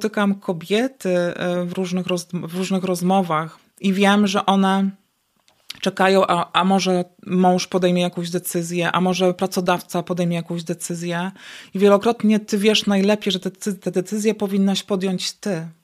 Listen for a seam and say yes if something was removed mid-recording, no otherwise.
yes